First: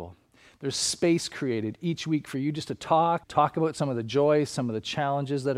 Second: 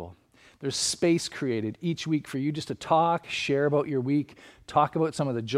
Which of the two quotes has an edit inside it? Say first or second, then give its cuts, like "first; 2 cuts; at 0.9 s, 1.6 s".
first; 1 cut; at 3.2 s